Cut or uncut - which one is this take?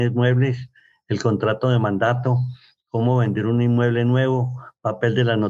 uncut